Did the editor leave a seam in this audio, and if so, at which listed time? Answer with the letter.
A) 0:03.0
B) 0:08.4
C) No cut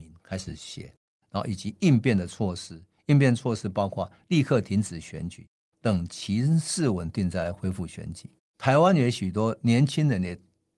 B